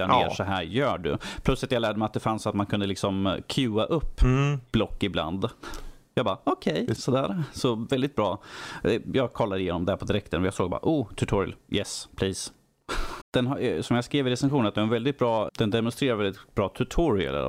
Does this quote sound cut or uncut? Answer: cut